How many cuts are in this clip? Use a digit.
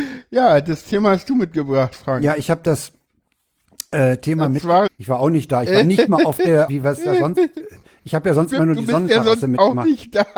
2